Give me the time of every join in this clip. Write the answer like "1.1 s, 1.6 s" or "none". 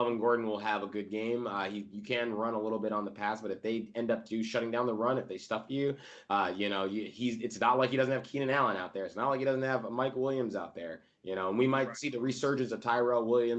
none